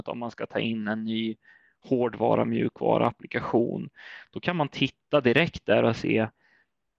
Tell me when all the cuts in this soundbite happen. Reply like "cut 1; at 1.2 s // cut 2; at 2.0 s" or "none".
none